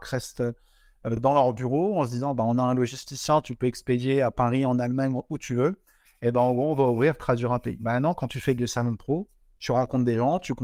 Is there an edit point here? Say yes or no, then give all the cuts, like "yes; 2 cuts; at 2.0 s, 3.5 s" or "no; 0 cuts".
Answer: no; 0 cuts